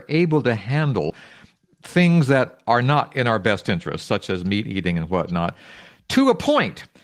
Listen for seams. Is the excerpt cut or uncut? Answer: uncut